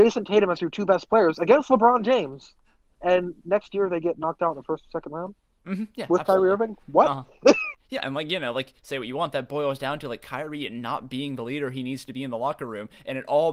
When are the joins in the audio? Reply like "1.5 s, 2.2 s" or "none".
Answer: none